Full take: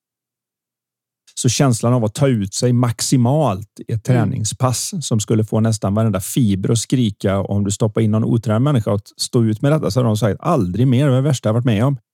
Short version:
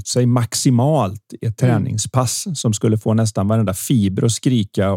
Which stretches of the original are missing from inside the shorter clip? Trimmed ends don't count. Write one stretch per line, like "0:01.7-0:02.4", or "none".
none